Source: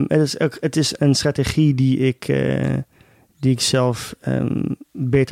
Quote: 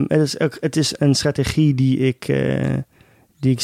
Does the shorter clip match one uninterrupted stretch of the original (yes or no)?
yes